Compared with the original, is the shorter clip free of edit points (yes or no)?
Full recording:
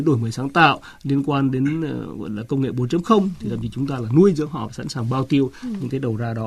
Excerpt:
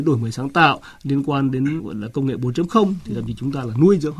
no